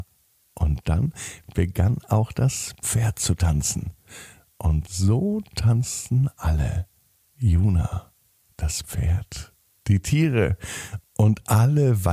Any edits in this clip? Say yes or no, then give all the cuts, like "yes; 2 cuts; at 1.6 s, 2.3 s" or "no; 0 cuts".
no; 0 cuts